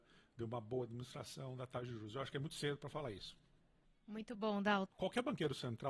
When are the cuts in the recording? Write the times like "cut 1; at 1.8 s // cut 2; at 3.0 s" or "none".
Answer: cut 1; at 4.9 s